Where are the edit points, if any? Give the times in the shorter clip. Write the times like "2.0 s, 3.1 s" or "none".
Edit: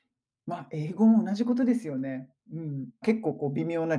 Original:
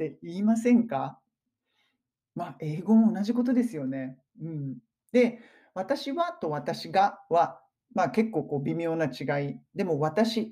3.0 s

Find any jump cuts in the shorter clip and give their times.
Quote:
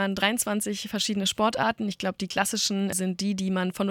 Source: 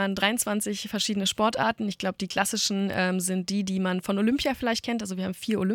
2.9 s

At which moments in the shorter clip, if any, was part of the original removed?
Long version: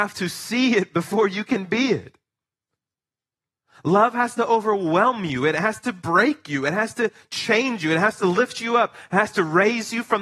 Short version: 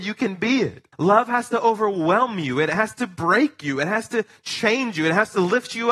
0.9 s

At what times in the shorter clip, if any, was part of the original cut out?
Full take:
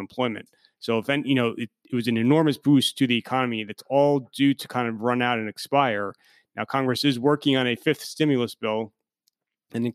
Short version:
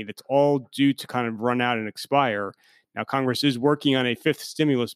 none

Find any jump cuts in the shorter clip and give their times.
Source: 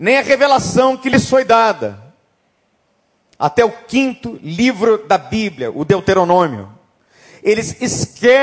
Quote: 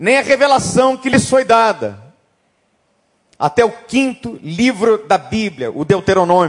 none

